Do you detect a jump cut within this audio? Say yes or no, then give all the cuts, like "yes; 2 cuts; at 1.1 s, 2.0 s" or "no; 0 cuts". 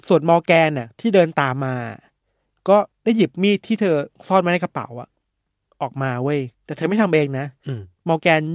yes; 2 cuts; at 2.9 s, 6.5 s